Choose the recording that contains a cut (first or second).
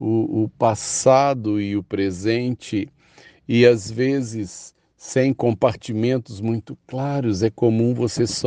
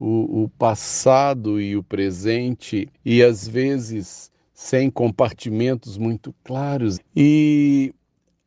second